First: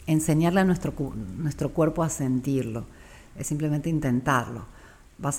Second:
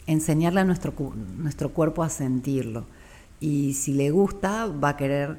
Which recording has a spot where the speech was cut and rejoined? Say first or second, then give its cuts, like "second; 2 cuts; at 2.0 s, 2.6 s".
first; 1 cut; at 3.2 s